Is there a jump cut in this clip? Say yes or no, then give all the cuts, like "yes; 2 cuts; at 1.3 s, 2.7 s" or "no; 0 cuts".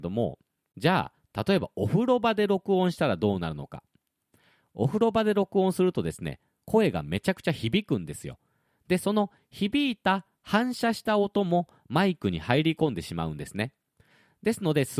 no; 0 cuts